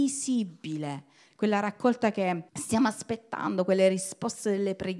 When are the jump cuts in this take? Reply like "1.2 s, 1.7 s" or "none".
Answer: 1.3 s, 2.5 s